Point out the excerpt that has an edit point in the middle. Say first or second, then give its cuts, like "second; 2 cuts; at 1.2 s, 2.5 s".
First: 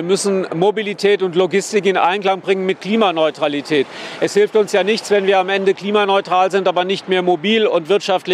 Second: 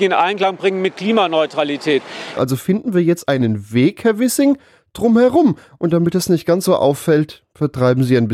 second; 1 cut; at 2.3 s